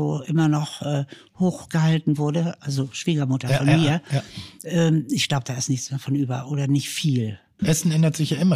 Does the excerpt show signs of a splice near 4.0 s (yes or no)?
no